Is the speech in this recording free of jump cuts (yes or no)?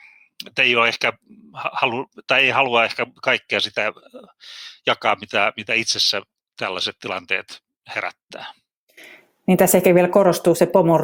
yes